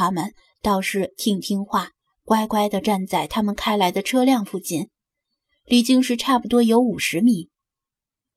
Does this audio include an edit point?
no; 0 cuts

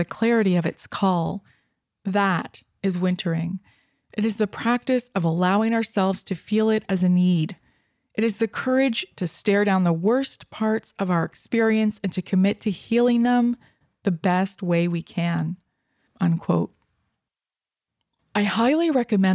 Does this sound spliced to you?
yes; 2 cuts; at 4.0 s, 16.1 s

